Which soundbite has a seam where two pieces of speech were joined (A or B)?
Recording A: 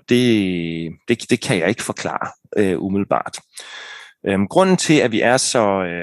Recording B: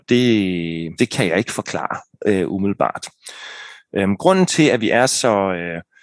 B